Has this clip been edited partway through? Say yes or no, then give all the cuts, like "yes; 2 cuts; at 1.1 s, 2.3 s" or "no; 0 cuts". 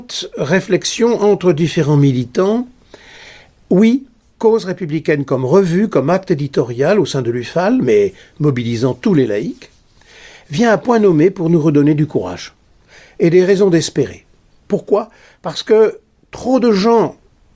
no; 0 cuts